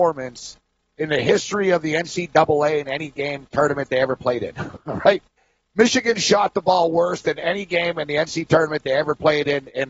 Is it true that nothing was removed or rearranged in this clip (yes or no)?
yes